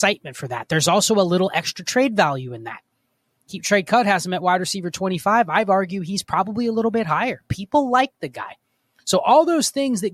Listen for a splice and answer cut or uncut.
uncut